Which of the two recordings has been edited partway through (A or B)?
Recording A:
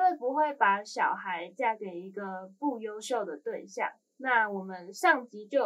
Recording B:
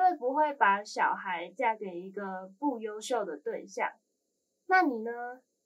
A